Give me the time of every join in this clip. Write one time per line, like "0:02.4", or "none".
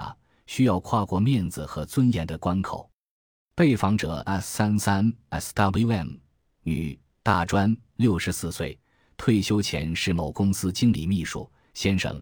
none

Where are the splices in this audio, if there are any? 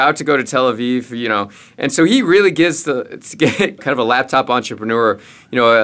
0:03.8

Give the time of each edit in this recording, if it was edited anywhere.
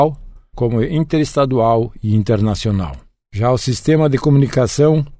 0:03.2

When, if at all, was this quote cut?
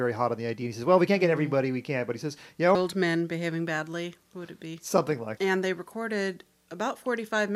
0:02.7
0:05.4

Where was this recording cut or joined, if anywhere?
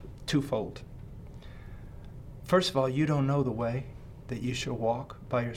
none

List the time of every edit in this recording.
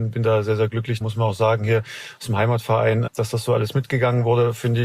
0:01.0
0:03.1

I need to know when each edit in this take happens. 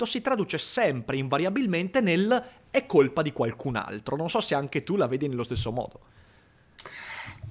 none

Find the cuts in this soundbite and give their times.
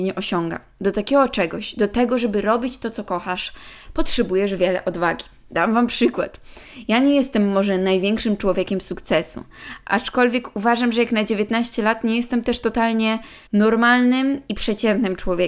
0:13.5

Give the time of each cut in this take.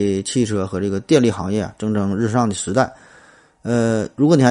none

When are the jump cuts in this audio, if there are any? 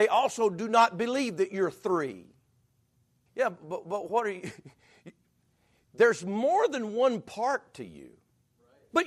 0:03.3

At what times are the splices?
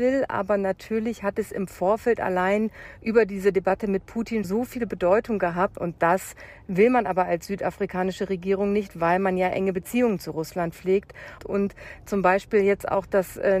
0:04.4
0:05.8
0:11.4

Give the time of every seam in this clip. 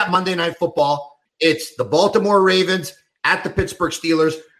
0:01.3

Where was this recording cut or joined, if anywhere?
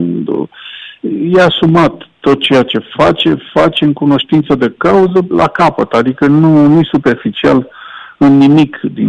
0:05.3

